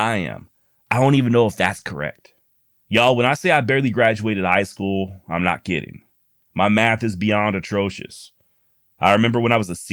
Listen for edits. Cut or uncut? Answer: uncut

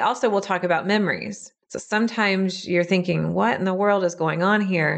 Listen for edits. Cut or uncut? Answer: cut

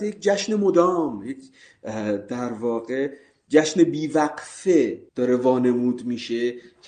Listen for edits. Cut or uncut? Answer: cut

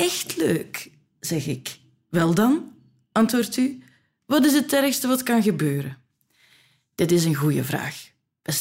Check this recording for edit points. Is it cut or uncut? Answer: uncut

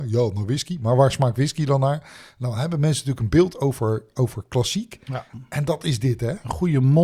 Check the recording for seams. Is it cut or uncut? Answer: uncut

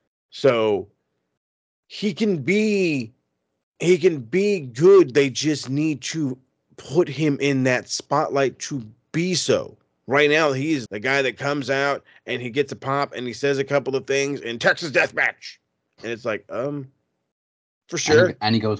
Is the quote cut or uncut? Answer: cut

